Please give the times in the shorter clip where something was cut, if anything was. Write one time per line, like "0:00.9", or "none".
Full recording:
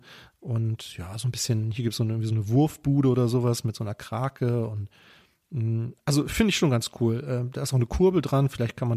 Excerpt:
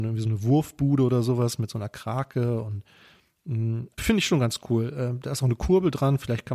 0:04.0